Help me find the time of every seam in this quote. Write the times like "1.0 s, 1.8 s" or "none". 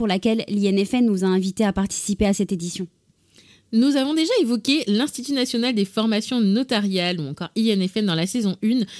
none